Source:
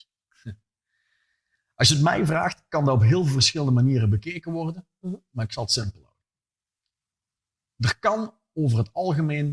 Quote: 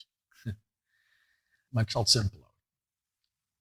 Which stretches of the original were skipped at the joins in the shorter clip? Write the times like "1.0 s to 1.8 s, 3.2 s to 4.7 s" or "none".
1.7 s to 5.3 s